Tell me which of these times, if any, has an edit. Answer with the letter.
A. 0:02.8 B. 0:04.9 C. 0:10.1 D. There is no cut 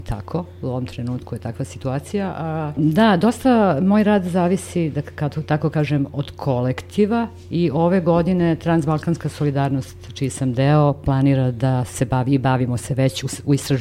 A